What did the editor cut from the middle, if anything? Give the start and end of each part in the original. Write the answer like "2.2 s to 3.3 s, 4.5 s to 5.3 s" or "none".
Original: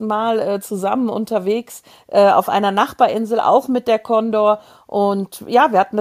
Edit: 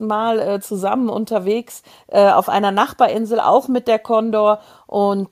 none